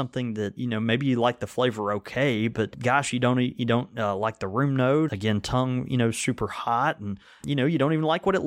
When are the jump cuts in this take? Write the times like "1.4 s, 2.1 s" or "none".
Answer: 5.1 s